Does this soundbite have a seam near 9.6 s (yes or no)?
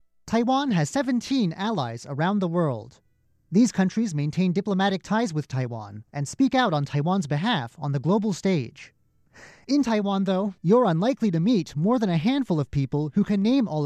no